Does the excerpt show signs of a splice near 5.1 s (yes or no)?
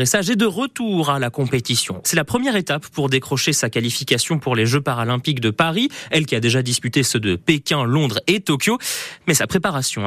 no